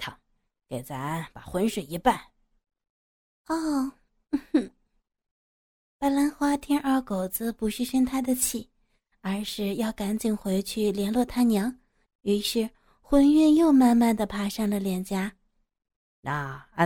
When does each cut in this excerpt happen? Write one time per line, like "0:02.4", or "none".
0:12.1